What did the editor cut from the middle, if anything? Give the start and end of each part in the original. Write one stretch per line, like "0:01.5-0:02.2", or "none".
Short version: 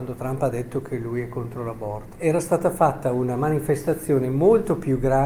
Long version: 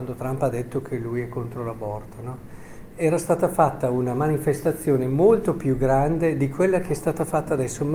0:02.2-0:02.9